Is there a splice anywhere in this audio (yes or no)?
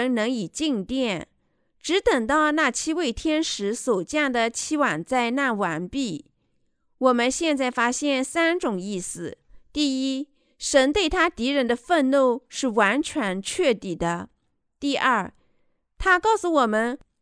no